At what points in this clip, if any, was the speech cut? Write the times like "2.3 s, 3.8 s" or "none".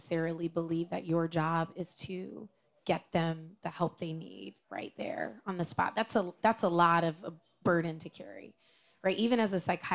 none